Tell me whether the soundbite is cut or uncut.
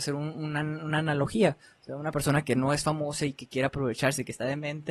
uncut